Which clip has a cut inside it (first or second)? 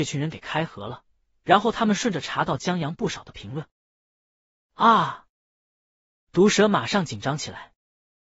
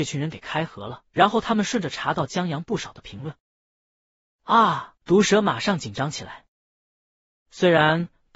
second